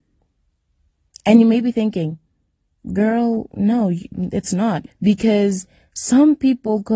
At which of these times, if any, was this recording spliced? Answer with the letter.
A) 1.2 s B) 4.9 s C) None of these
B